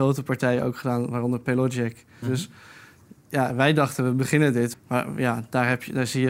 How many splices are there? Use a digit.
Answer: 2